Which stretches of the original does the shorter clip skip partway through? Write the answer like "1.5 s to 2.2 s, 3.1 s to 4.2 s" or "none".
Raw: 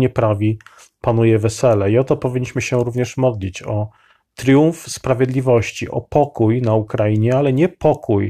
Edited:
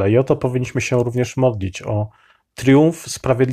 none